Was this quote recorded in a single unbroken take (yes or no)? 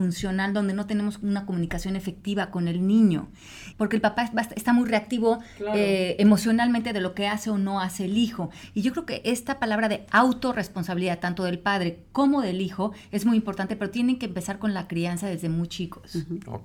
no